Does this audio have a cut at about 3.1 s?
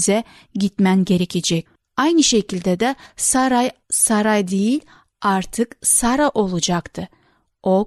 no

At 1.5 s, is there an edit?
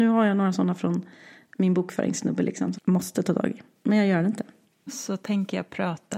no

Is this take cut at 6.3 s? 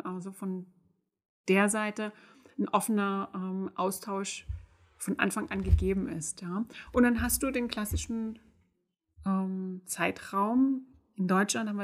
no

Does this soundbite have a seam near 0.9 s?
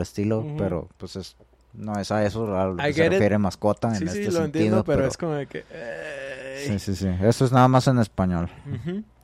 yes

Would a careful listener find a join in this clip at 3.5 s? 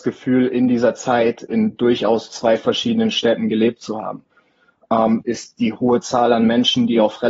no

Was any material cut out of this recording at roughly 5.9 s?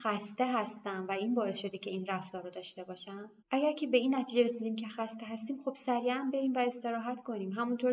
no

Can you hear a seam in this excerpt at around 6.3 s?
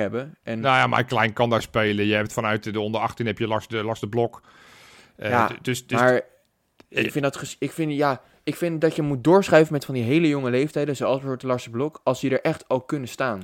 no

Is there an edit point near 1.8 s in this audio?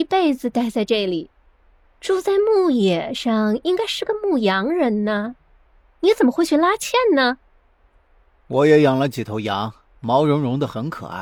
yes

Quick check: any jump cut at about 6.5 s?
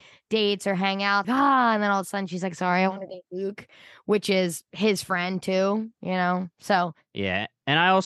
no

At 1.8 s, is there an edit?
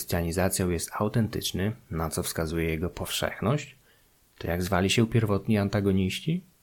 no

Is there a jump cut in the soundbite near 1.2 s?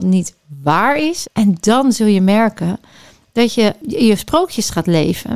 yes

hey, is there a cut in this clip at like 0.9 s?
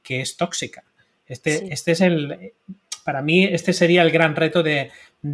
no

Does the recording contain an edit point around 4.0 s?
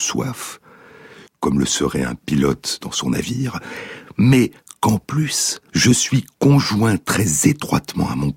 no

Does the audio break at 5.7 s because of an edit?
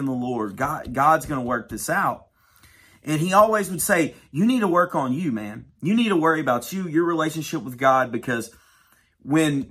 no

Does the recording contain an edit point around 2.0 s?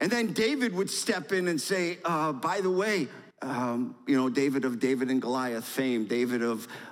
no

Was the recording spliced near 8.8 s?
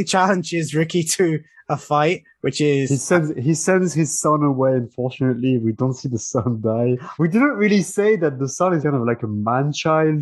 yes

